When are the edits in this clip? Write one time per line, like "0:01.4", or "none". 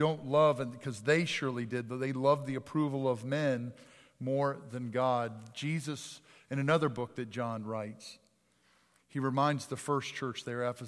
none